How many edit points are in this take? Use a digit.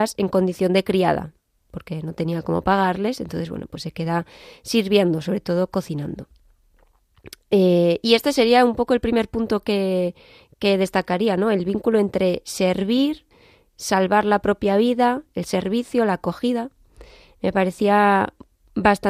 0